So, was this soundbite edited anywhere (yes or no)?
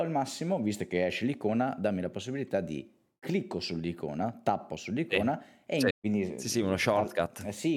yes